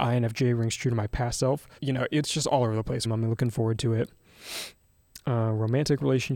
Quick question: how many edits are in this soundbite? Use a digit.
2